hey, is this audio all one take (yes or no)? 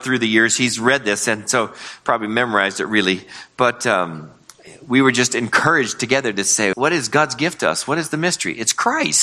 no